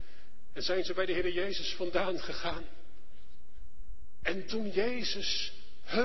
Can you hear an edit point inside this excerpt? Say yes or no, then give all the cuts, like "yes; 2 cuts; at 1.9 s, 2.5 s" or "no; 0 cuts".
yes; 1 cut; at 4.2 s